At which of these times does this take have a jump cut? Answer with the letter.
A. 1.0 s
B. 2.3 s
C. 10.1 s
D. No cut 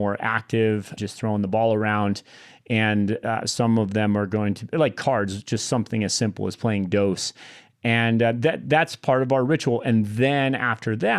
A